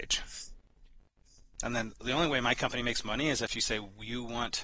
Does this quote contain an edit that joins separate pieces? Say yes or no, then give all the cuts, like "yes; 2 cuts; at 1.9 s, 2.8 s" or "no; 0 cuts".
yes; 1 cut; at 1.6 s